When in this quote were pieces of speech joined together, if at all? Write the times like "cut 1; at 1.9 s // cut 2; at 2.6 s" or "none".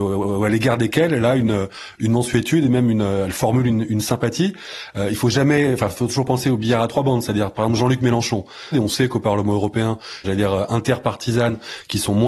cut 1; at 8.7 s // cut 2; at 10.2 s